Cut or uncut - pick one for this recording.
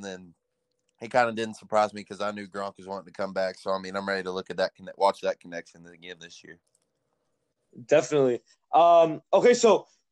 uncut